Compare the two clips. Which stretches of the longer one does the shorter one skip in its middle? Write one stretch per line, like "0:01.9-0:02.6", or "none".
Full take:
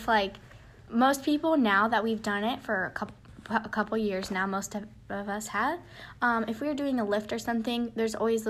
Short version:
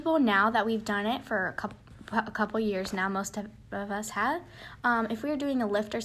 none